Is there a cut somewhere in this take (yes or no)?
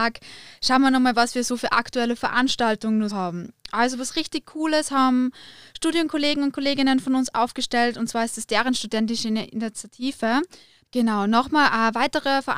yes